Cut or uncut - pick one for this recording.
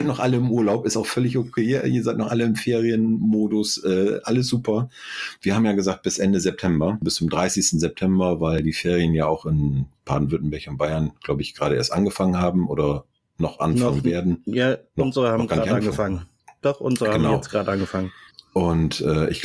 cut